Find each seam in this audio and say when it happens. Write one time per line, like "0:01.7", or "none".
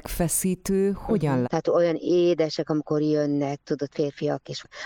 0:01.4